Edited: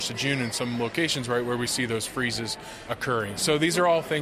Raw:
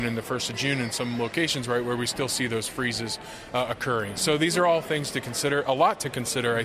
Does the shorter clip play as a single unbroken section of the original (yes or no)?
no